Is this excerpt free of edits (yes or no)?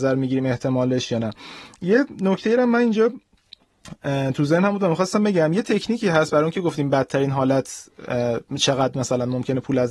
yes